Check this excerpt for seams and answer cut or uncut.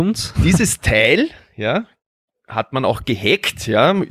uncut